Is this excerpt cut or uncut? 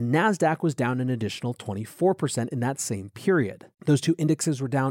cut